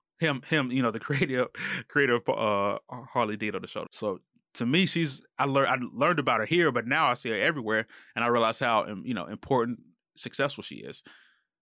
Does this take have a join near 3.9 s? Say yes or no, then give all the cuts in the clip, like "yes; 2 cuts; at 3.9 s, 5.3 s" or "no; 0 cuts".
yes; 1 cut; at 3.9 s